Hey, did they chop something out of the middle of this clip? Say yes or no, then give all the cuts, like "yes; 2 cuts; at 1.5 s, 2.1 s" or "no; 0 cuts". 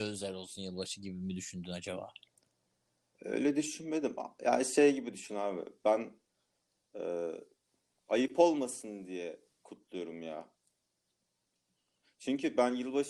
no; 0 cuts